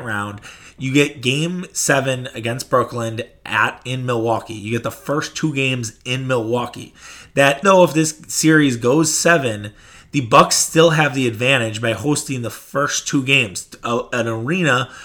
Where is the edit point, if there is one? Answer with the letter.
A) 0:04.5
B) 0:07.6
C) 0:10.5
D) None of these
B